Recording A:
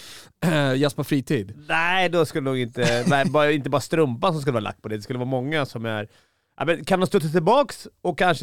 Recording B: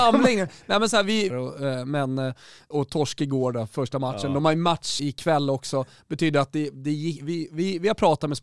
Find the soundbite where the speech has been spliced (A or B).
B